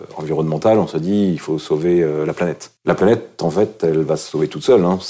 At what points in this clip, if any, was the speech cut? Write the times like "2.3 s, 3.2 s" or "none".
2.8 s